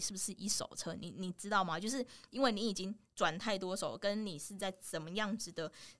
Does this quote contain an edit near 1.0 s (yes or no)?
no